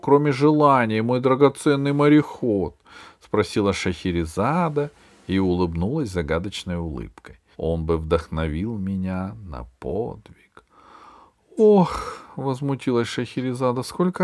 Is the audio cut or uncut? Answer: cut